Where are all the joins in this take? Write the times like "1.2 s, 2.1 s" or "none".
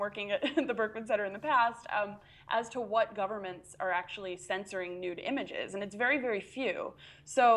none